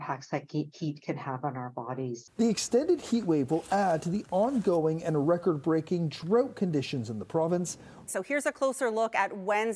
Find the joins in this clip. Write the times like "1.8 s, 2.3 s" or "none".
2.3 s, 8.1 s